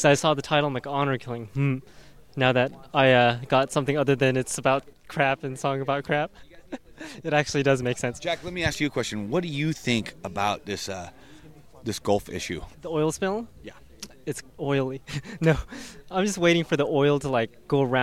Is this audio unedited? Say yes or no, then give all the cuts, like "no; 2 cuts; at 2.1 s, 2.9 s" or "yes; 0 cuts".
no; 2 cuts; at 12.7 s, 14.4 s